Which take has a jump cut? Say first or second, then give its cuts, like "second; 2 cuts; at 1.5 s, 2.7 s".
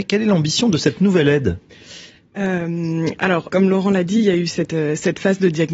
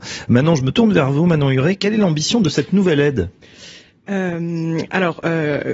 first; 1 cut; at 3.5 s